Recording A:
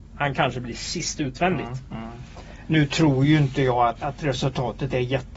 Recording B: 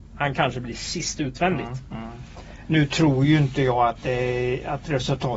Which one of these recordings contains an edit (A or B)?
A